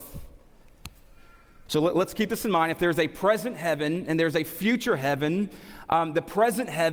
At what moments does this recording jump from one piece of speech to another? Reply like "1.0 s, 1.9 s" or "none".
1.7 s

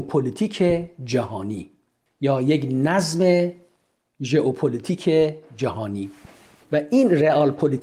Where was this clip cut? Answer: none

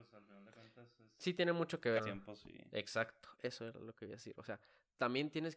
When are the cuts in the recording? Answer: 2.0 s

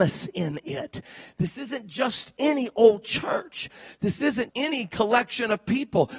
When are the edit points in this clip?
4.5 s

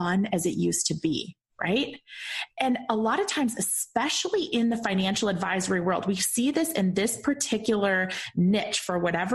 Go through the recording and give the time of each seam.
none

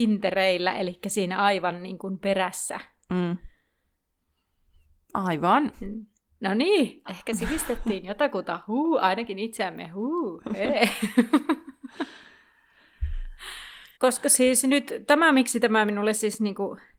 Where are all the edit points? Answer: 7.1 s, 14.0 s

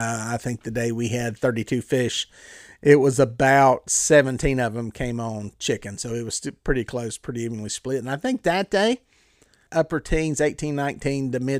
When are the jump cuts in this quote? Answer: 9.7 s

